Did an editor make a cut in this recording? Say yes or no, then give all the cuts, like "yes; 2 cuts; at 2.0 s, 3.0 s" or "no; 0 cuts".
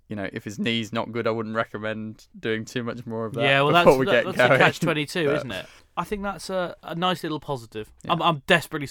yes; 1 cut; at 5.8 s